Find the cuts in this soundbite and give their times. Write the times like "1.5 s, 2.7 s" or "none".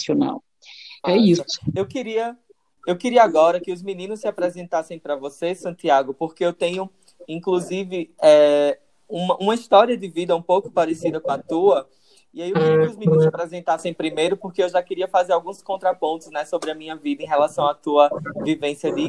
1.0 s